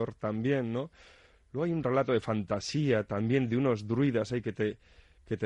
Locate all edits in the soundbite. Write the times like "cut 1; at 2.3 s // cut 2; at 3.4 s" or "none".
none